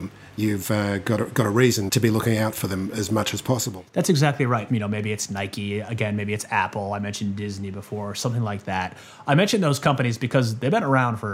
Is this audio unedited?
no; 1 cut; at 4.7 s

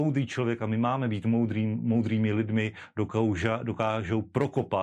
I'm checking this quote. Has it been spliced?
no; 0 cuts

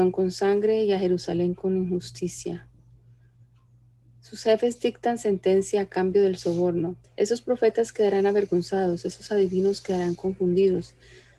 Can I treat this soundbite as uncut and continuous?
no; 1 cut; at 7.0 s

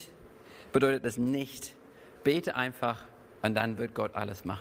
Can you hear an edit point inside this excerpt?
no; 0 cuts

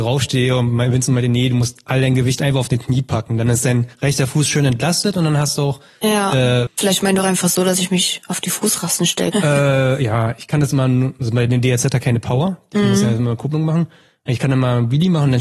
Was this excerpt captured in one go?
no; 2 cuts; at 6.7 s, 9.3 s

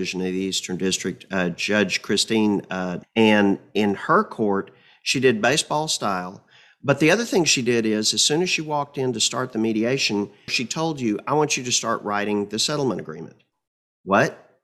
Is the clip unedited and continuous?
no; 1 cut; at 3.0 s

